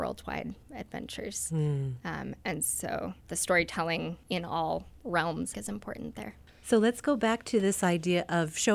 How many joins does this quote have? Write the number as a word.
one